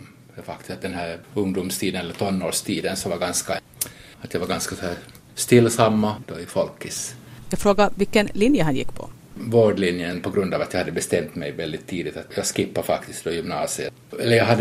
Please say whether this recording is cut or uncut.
cut